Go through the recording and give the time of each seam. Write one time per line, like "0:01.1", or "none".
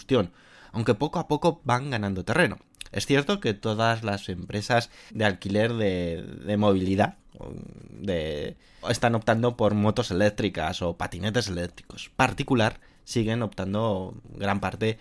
0:05.1
0:08.8
0:12.1